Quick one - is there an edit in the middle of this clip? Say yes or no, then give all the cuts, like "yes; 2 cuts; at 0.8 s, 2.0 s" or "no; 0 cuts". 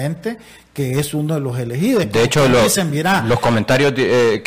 no; 0 cuts